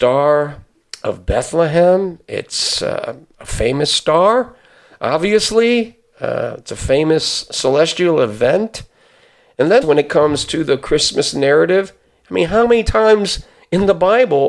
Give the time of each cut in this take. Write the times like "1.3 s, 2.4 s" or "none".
9.8 s